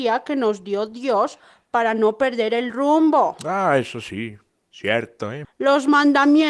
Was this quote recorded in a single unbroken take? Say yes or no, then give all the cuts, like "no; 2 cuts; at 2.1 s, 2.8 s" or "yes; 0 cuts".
no; 1 cut; at 5.4 s